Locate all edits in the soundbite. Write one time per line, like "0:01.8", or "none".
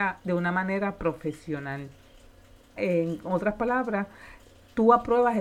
0:02.8